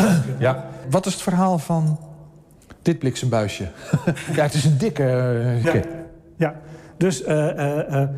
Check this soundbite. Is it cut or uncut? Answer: cut